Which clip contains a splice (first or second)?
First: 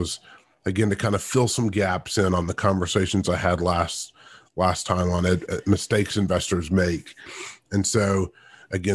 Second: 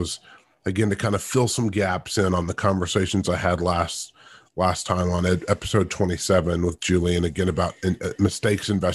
first